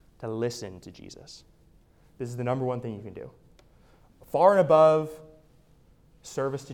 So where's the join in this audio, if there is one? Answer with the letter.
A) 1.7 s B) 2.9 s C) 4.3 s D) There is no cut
D